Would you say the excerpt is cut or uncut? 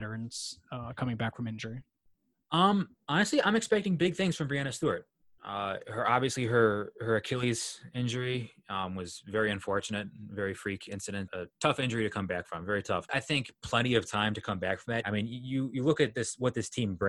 cut